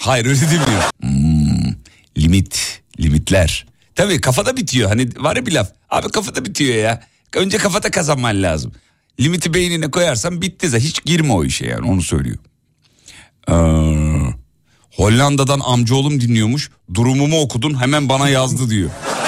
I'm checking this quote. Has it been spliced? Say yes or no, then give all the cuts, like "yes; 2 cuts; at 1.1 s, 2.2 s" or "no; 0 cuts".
yes; 1 cut; at 0.9 s